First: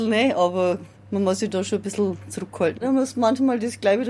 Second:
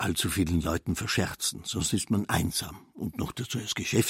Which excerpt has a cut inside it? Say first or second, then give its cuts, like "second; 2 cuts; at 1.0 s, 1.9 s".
first; 1 cut; at 2.8 s